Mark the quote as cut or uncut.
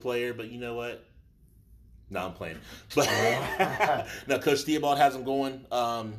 uncut